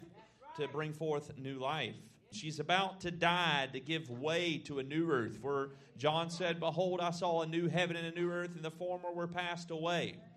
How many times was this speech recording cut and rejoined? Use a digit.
1